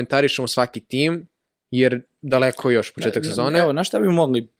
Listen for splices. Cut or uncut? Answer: uncut